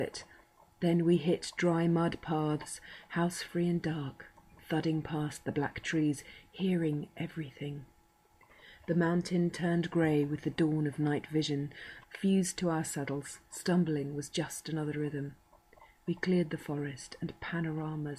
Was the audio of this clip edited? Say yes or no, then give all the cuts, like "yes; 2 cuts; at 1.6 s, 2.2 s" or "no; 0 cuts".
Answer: yes; 1 cut; at 12.0 s